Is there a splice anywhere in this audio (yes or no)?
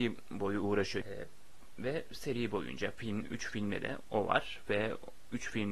yes